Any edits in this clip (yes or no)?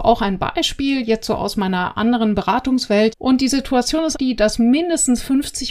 yes